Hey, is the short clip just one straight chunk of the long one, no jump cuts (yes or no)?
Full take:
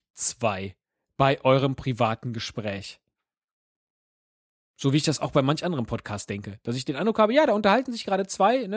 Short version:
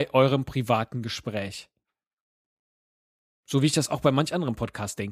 yes